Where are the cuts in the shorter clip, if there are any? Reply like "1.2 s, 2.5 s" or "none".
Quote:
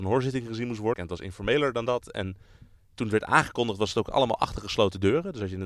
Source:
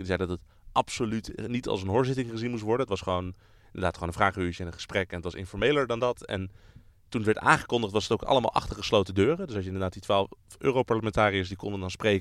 0.9 s